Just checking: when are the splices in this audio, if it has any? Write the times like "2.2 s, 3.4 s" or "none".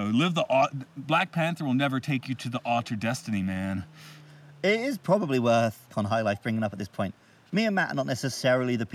5.9 s